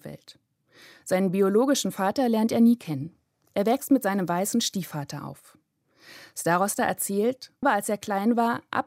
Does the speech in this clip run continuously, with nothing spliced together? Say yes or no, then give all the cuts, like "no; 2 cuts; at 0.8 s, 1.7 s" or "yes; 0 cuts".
no; 1 cut; at 7.6 s